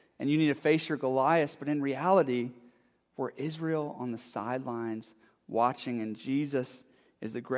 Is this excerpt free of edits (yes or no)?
yes